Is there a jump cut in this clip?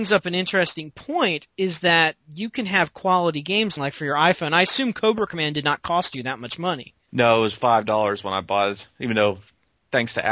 yes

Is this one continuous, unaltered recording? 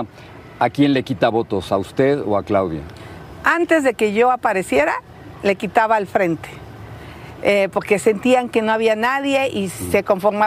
yes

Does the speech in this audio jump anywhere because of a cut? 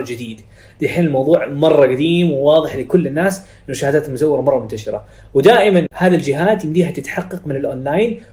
no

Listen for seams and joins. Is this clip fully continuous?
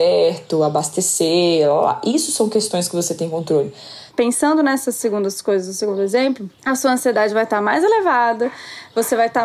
no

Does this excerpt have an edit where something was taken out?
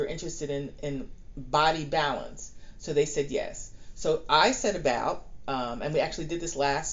no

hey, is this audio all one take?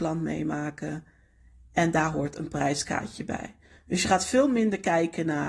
yes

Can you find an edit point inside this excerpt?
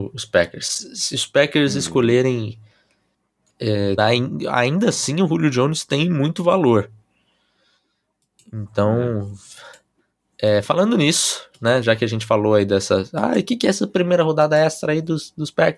yes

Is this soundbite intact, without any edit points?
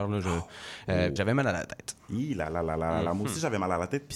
no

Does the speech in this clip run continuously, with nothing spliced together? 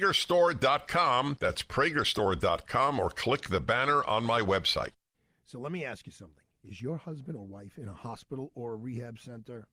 yes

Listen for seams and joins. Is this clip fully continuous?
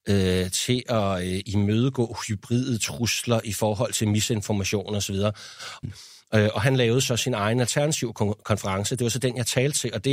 no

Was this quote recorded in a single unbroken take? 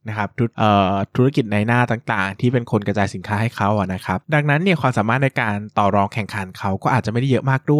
no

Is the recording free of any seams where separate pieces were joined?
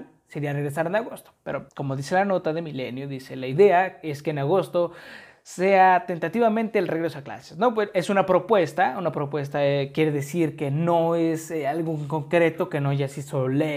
no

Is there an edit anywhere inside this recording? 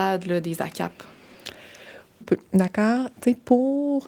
yes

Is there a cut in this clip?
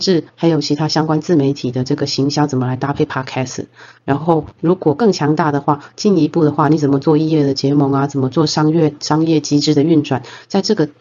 no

